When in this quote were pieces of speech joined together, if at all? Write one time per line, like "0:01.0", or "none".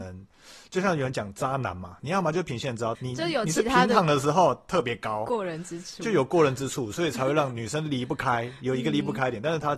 0:02.9